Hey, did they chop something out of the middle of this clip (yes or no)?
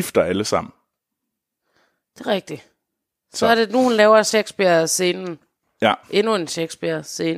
no